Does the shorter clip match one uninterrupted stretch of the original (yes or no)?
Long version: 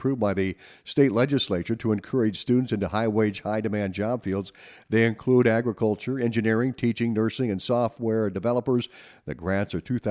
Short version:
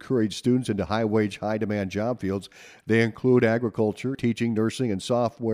no